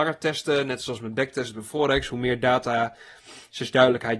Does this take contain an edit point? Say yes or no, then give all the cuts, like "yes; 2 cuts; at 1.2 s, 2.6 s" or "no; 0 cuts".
no; 0 cuts